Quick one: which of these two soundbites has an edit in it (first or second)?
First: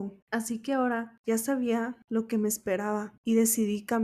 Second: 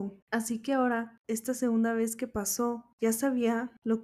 first